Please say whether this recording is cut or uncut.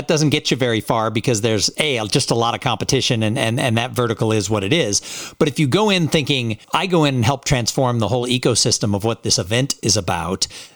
cut